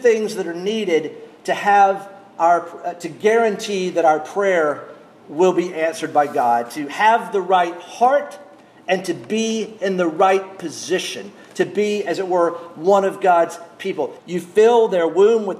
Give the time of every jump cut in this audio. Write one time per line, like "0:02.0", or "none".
0:14.2